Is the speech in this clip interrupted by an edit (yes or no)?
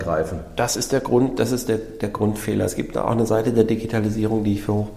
no